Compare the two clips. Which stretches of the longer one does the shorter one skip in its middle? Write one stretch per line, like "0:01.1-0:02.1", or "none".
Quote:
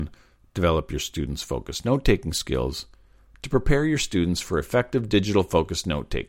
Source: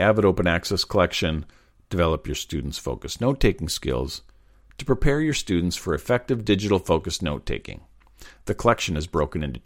none